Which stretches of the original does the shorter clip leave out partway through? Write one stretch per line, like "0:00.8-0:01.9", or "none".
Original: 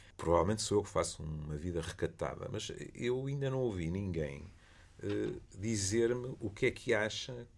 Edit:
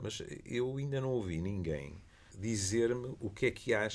0:04.8-0:05.5

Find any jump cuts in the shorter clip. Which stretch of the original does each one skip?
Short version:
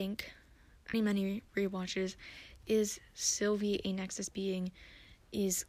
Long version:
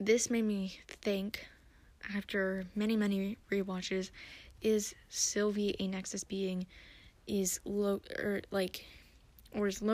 0:02.1-0:02.9

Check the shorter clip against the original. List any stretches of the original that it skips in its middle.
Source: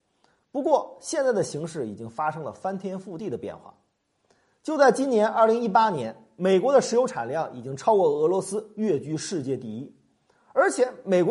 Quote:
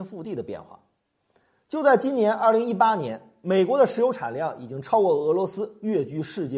none

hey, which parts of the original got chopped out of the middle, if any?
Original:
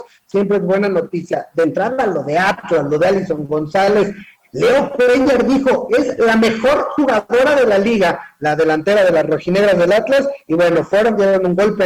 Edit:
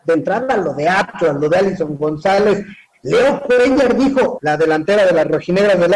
0:05.9-0:08.4

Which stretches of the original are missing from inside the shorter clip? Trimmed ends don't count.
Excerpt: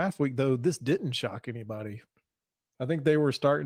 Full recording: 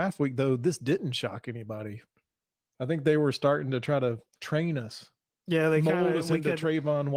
none

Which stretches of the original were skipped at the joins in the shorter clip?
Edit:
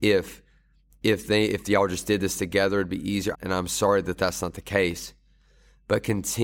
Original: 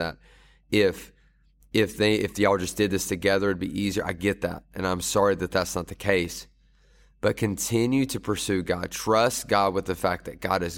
0:04.0-0:04.7

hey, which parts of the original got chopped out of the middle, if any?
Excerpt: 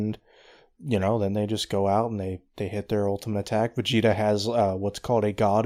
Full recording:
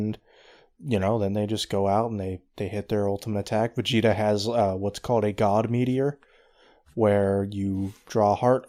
none

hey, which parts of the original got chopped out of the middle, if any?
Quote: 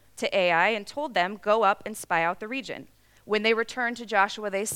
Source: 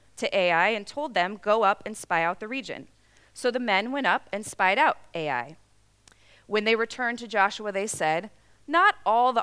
0:03.2-0:06.4

